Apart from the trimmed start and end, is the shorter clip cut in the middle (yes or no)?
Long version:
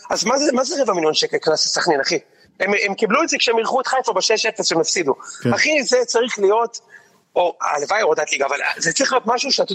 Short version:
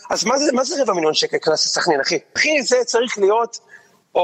yes